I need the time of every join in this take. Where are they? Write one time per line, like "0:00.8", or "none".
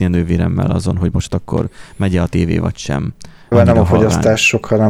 0:03.5